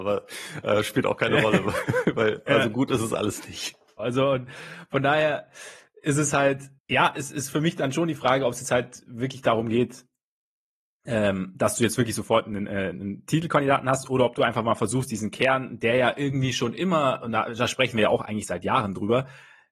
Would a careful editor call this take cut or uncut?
cut